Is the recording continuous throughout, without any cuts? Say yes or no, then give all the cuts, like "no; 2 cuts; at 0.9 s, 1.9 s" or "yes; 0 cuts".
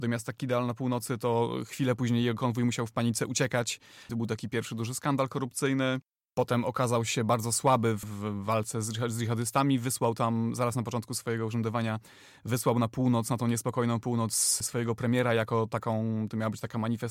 no; 1 cut; at 4.1 s